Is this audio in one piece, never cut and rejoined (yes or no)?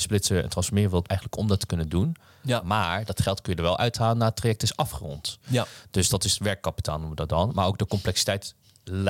no